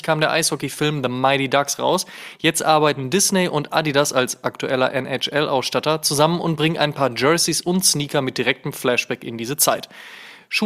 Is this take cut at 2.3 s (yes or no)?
no